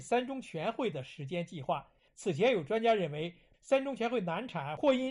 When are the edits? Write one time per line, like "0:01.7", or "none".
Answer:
0:02.1
0:03.5